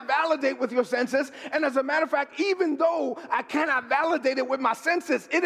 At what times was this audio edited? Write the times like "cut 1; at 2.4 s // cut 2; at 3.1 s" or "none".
none